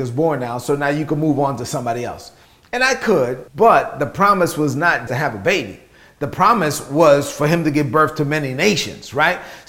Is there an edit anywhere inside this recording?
yes; 2 cuts; at 3.5 s, 5.1 s

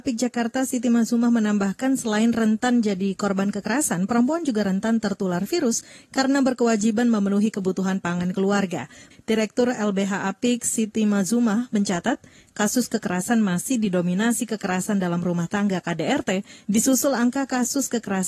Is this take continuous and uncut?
no; 1 cut; at 9.1 s

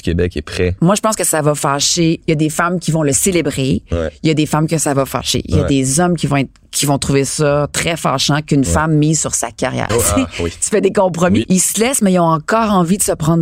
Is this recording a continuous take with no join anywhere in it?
no; 2 cuts; at 9.9 s, 11.4 s

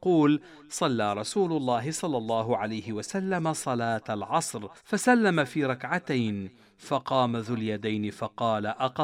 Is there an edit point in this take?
yes; 1 cut; at 4.8 s

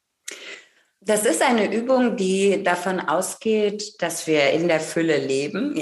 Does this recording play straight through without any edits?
yes; 0 cuts

